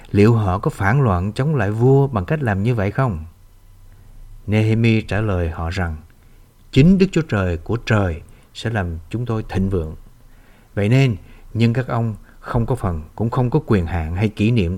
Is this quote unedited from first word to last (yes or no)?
no